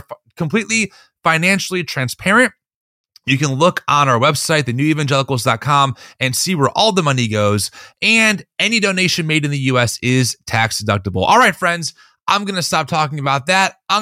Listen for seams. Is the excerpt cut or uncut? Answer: uncut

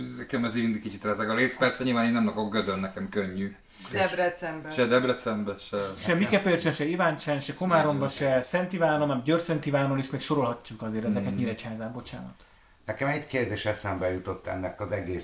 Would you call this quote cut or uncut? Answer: cut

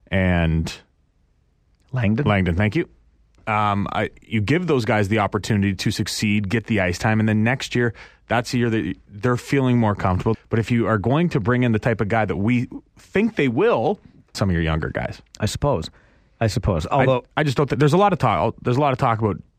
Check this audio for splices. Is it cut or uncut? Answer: cut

